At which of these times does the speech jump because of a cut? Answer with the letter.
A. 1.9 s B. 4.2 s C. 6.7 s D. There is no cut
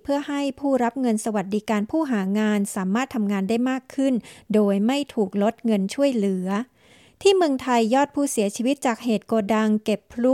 D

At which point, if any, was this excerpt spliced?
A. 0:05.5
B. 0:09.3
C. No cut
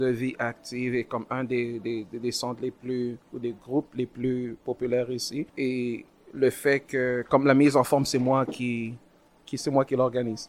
A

